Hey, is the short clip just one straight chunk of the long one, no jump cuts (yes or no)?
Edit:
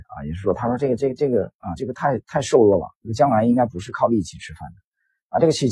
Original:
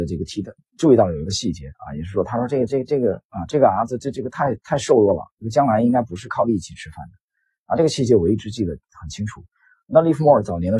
no